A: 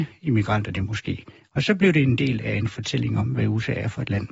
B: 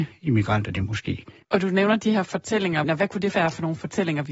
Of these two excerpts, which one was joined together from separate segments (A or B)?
B